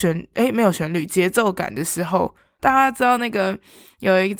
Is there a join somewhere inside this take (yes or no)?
yes